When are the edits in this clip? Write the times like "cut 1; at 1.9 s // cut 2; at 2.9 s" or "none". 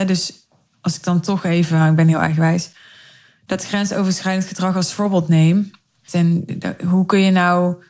cut 1; at 6.1 s